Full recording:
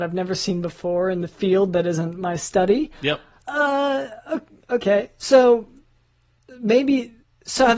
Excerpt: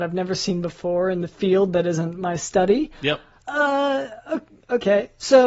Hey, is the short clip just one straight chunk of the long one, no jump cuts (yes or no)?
yes